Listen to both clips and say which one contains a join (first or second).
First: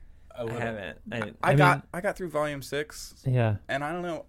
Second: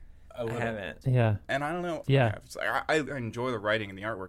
second